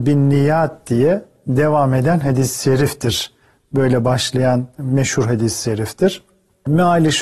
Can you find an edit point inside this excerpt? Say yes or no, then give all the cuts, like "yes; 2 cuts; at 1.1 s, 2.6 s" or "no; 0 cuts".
no; 0 cuts